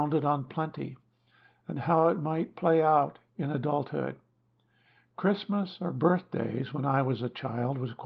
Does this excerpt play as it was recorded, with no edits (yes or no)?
no